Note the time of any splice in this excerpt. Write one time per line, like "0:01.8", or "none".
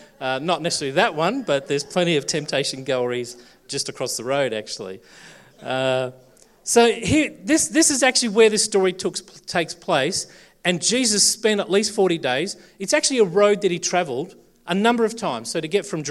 none